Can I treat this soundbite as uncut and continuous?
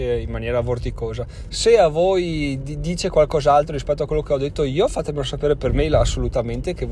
no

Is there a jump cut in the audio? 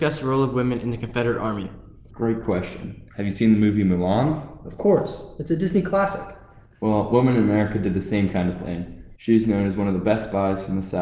yes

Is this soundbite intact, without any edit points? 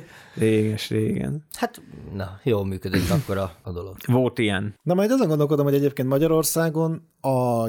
yes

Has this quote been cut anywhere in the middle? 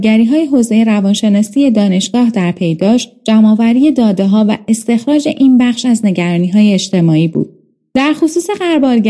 no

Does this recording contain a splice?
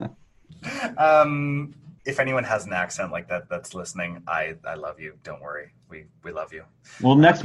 no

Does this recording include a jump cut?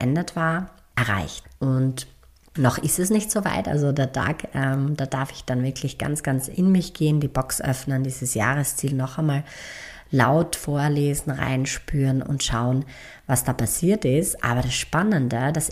yes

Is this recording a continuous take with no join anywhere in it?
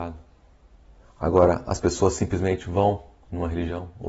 no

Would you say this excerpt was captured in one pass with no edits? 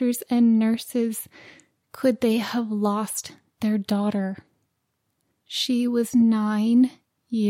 no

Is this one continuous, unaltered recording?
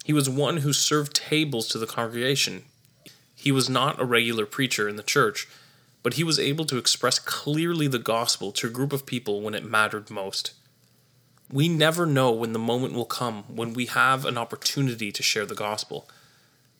yes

